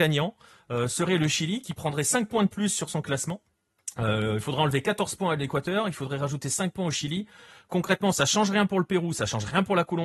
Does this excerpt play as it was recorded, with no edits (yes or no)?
yes